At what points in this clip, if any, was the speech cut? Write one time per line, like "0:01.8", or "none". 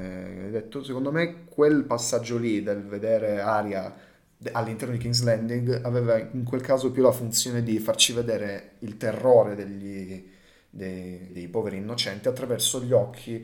0:11.3